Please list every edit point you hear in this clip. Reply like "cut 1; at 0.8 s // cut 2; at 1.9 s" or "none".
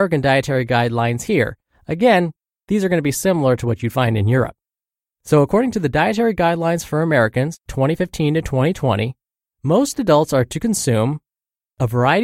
none